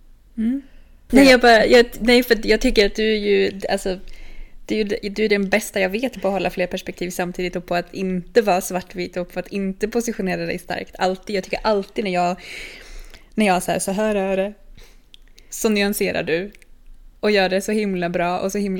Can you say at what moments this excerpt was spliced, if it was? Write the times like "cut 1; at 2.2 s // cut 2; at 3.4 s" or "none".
cut 1; at 1.1 s